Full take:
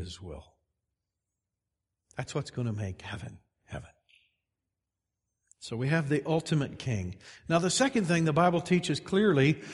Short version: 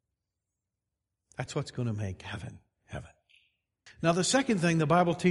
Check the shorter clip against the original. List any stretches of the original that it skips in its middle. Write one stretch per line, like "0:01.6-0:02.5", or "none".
0:04.7-0:07.3